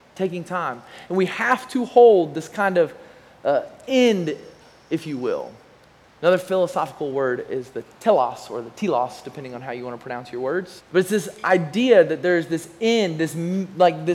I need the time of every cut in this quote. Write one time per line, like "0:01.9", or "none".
0:10.8